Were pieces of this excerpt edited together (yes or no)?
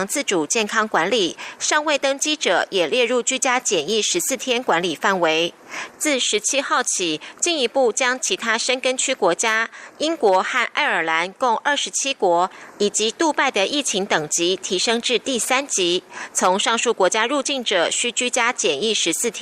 yes